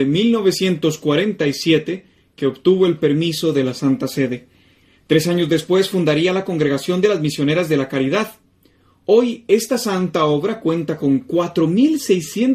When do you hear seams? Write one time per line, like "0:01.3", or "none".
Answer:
none